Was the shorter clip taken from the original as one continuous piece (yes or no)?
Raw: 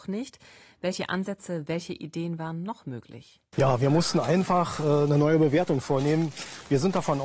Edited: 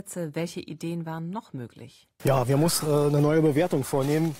no